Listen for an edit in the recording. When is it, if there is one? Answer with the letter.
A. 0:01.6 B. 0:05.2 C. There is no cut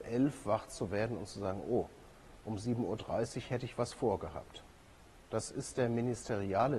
B